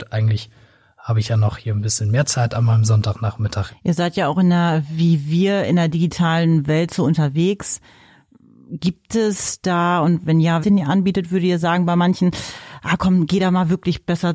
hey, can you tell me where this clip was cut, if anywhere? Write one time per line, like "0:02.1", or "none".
0:03.7
0:10.6